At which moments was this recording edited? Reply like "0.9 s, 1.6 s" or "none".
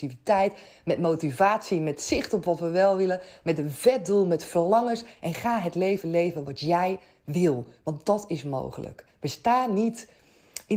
none